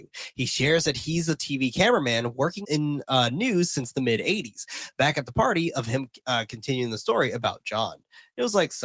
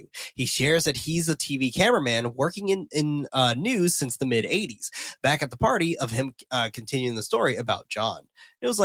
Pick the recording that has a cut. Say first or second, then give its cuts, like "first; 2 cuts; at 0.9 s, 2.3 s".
first; 1 cut; at 2.6 s